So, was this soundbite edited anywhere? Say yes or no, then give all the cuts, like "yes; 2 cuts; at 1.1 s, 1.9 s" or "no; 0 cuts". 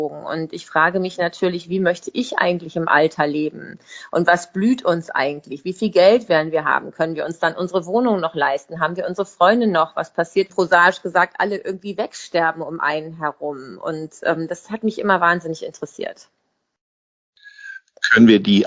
yes; 1 cut; at 10.5 s